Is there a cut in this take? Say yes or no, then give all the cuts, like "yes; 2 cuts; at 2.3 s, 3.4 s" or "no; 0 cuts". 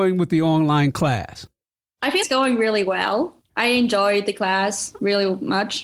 yes; 2 cuts; at 2.2 s, 3.5 s